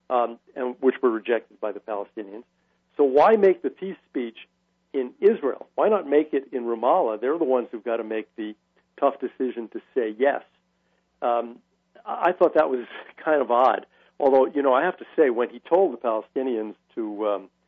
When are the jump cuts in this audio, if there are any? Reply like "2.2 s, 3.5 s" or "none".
none